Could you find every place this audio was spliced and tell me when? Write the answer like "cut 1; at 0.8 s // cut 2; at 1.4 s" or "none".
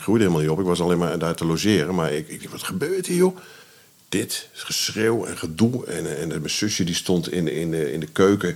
none